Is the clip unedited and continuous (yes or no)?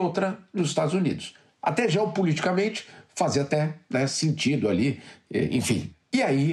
yes